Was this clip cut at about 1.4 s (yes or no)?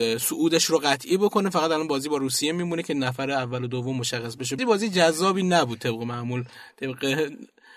no